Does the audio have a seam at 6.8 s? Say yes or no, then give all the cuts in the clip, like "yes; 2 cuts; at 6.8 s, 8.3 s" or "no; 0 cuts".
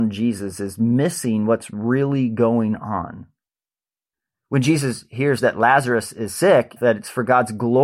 yes; 1 cut; at 6.8 s